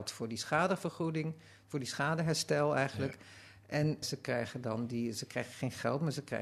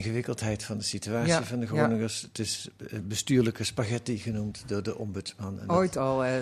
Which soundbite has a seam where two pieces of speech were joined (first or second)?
first